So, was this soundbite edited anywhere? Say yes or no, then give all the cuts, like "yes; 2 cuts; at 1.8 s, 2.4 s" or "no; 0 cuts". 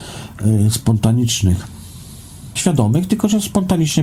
yes; 1 cut; at 2.6 s